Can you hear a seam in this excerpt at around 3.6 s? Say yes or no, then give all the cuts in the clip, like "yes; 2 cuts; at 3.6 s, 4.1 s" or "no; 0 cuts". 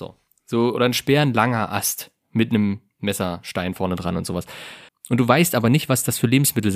no; 1 cut; at 4.9 s